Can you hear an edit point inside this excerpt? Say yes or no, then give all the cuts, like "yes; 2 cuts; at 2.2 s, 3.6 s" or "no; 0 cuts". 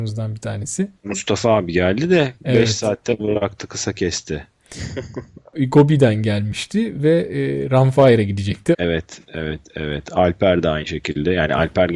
yes; 1 cut; at 8.7 s